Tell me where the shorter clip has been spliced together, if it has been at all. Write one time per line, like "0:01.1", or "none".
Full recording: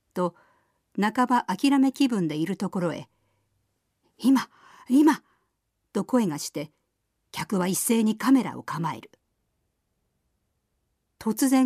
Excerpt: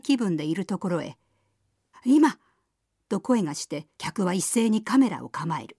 0:01.9
0:03.9